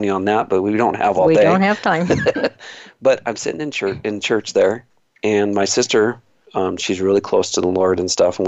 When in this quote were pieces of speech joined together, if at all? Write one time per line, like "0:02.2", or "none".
0:06.4